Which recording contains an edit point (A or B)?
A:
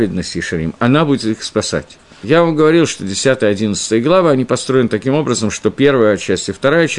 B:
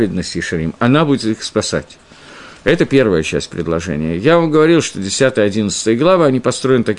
A